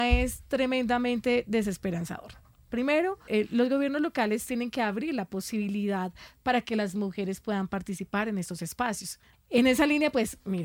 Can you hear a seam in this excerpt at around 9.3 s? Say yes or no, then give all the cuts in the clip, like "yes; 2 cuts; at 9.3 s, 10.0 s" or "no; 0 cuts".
yes; 2 cuts; at 3.3 s, 9.3 s